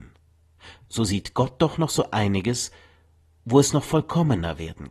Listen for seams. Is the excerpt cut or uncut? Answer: uncut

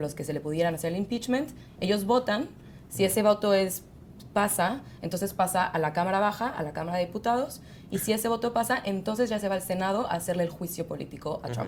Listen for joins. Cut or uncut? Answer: uncut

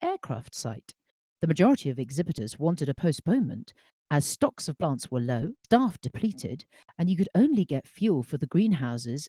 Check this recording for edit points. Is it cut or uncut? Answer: cut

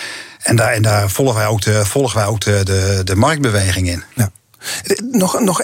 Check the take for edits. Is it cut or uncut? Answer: cut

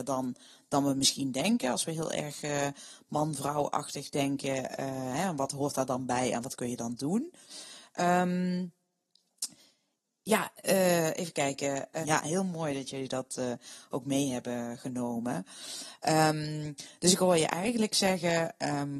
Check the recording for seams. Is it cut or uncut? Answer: cut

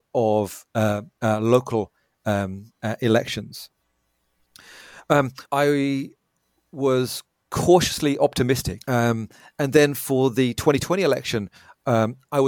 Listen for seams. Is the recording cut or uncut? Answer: cut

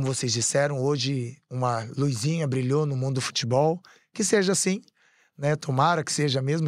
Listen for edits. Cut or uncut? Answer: uncut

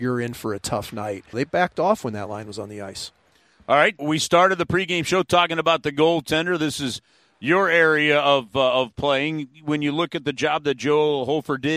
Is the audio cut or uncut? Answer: cut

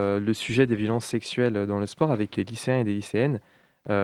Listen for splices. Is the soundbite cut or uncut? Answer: cut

